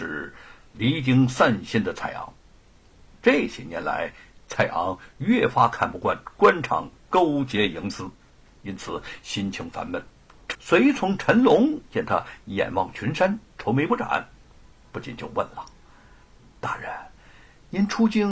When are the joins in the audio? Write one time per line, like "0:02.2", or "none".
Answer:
0:08.5
0:10.5